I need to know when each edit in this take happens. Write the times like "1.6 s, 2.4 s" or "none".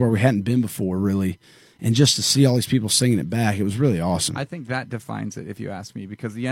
none